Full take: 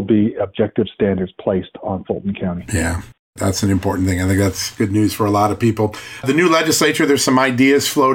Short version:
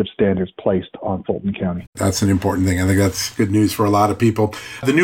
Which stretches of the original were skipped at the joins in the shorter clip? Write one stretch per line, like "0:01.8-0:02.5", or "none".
0:02.7-0:03.3